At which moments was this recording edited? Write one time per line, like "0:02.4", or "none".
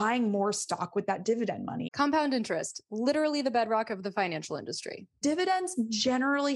0:01.8
0:05.2